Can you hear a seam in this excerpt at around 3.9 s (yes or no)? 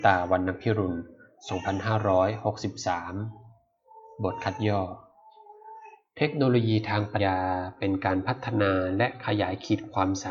no